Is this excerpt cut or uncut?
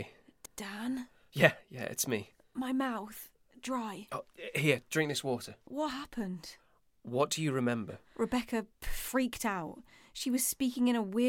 uncut